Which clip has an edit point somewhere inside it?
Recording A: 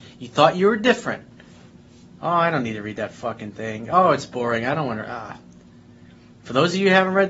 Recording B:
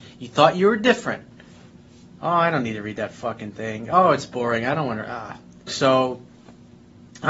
B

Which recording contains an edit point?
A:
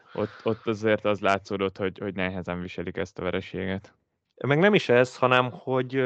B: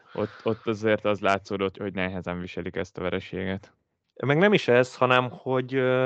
B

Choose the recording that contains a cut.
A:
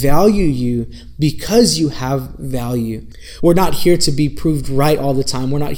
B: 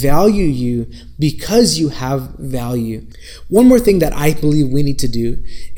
A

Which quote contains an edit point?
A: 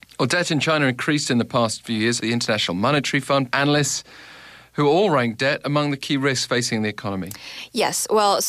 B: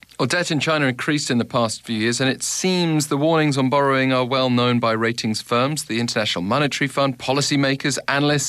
A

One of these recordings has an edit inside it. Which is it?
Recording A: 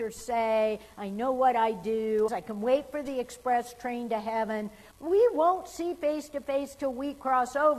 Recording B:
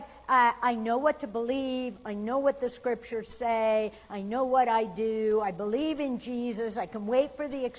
A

